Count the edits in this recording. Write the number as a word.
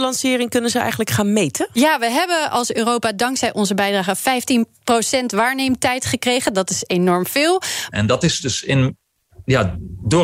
one